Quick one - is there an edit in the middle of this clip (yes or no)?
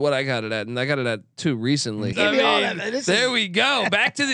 yes